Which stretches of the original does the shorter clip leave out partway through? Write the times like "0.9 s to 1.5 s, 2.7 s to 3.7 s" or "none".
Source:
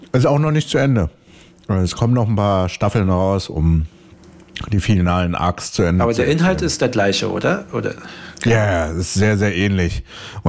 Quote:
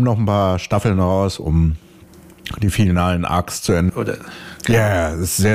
6.0 s to 7.7 s